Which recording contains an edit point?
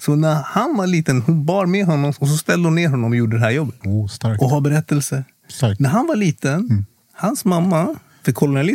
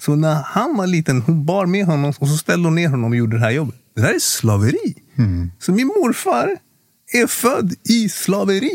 first; 1 cut; at 3.8 s

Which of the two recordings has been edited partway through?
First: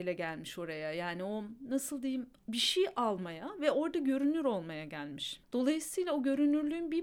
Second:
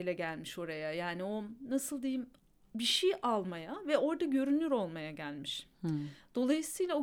first; 2 cuts; at 2.4 s, 5.4 s

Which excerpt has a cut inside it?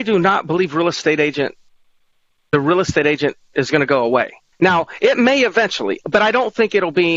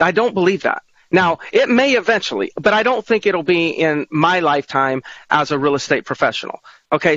first; 1 cut; at 4.5 s

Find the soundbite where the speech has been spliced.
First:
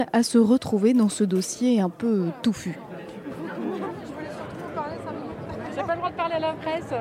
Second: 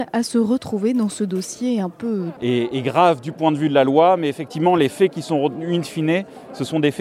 second; 1 cut; at 2.4 s

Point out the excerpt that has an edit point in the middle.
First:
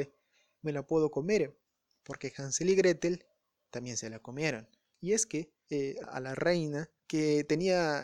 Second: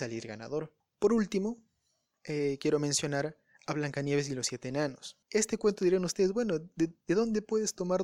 first; 2 cuts; at 4.9 s, 6.0 s

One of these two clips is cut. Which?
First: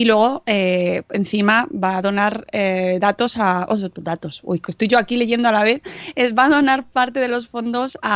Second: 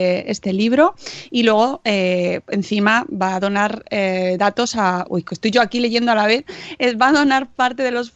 second; 1 cut; at 5.0 s

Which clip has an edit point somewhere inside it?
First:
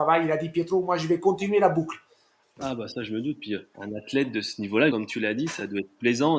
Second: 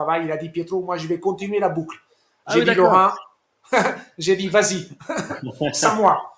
first; 3 cuts; at 2.4 s, 3.7 s, 4.9 s

